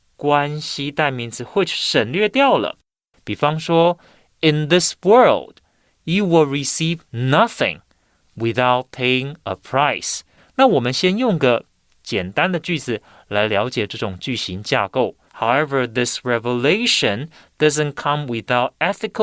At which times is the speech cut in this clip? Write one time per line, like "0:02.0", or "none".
0:03.1
0:10.4
0:15.3